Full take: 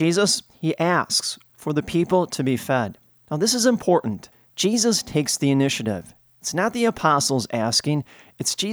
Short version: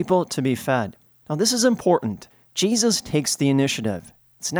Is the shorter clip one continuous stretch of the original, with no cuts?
yes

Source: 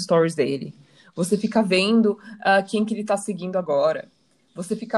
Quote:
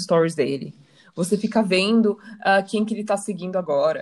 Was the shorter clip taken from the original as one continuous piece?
yes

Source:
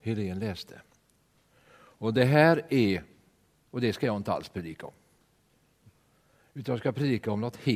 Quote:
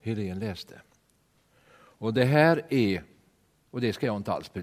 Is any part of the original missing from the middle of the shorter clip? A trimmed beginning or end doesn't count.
no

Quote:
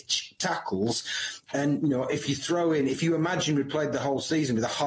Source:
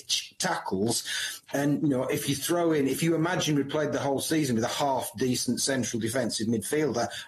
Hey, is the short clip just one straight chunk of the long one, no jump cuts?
yes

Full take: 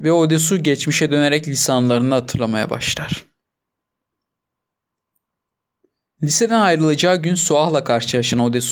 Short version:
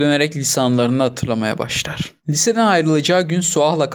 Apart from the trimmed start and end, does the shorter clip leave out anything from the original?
yes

